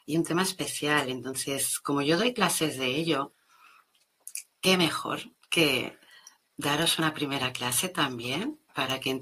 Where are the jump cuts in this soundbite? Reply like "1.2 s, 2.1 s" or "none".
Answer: none